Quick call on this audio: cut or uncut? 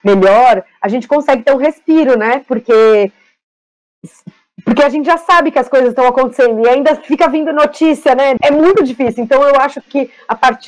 cut